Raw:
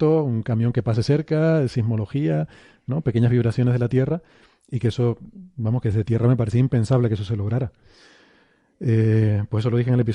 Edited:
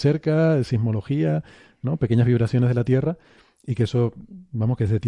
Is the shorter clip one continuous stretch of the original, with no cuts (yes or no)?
yes